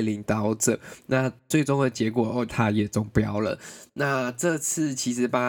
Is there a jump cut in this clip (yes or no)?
yes